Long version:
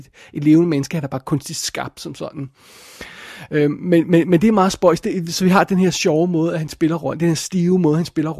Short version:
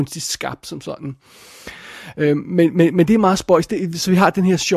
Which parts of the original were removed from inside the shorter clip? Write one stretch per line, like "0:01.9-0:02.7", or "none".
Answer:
none